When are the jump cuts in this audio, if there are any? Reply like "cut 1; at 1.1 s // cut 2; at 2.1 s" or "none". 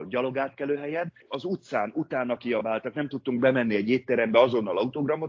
cut 1; at 1.2 s